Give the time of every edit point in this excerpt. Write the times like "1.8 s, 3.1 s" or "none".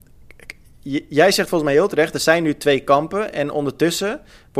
none